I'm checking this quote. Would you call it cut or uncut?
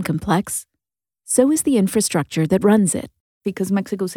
uncut